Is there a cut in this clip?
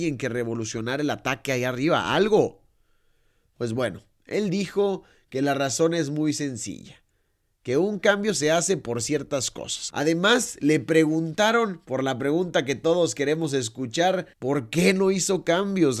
yes; 2 cuts; at 9.9 s, 14.3 s

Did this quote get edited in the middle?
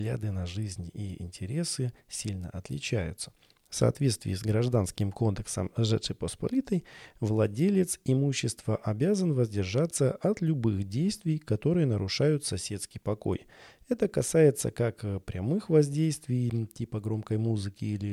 yes; 1 cut; at 3.7 s

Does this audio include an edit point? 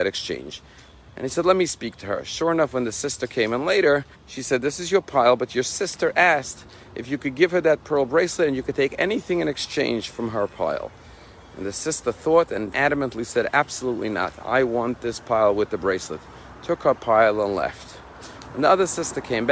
yes; 2 cuts; at 4.1 s, 12.7 s

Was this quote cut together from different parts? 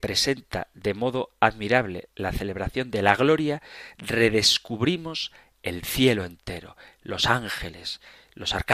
no; 0 cuts

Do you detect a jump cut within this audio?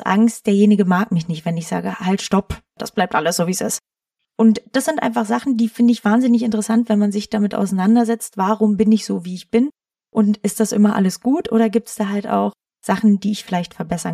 no; 0 cuts

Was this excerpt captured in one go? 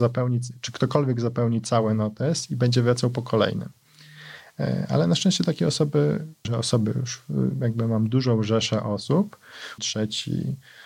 no; 2 cuts; at 6.4 s, 9.8 s

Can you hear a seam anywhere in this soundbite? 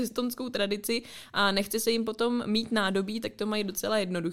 no; 0 cuts

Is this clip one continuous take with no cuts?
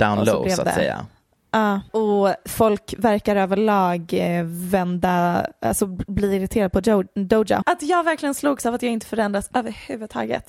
no; 2 cuts; at 1.9 s, 7.6 s

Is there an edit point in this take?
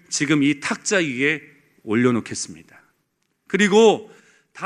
yes; 1 cut; at 3.5 s

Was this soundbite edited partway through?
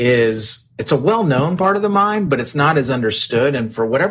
no; 0 cuts

